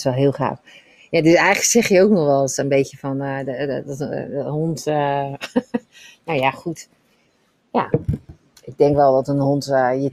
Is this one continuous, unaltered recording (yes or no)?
yes